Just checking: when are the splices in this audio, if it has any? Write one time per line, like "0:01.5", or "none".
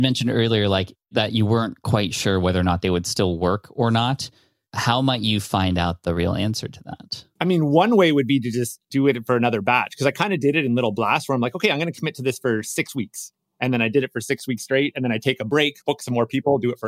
0:15.8